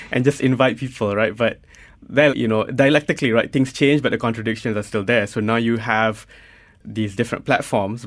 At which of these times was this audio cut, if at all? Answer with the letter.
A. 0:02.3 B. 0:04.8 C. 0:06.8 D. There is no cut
A